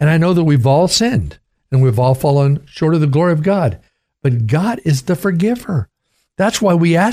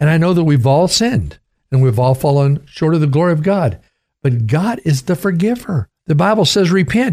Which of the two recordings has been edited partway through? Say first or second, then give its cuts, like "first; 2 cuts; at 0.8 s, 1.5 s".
second; 1 cut; at 6.0 s